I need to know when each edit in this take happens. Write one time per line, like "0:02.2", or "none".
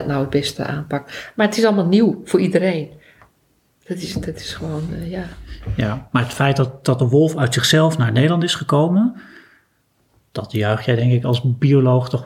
none